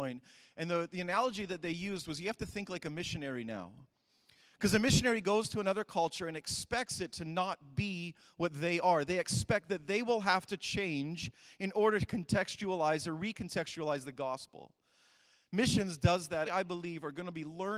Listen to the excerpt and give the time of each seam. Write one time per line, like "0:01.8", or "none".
0:16.5